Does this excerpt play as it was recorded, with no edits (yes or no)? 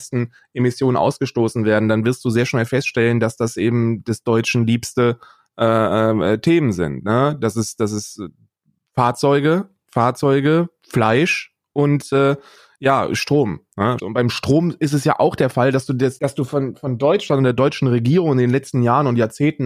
no